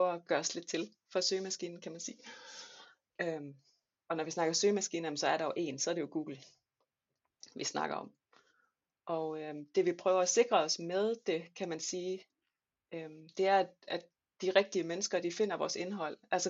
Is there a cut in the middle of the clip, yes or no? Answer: no